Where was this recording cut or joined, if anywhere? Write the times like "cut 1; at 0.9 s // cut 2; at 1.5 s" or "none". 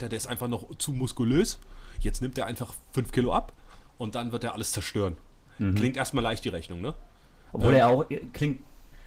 none